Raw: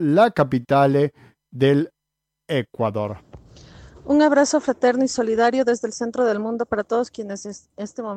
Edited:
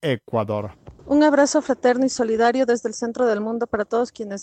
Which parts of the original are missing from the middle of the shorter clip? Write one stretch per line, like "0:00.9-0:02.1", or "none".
0:03.5-0:04.0